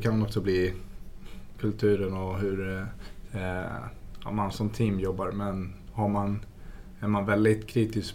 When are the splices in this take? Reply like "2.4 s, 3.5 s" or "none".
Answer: 1.5 s